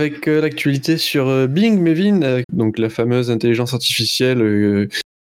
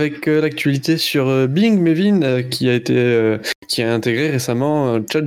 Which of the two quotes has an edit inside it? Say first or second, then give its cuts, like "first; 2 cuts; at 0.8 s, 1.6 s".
first; 1 cut; at 2.4 s